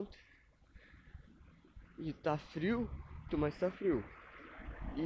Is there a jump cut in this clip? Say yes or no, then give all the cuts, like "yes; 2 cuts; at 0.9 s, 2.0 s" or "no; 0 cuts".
yes; 1 cut; at 3.3 s